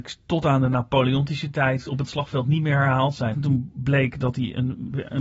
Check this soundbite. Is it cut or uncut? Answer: cut